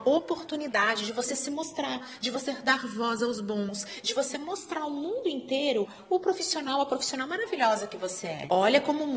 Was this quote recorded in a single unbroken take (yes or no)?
yes